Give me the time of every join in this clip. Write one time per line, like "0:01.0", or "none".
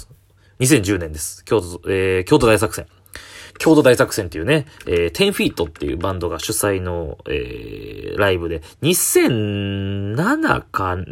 0:03.5